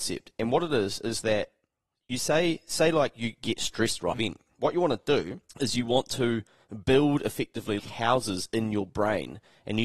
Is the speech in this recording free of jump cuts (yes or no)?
no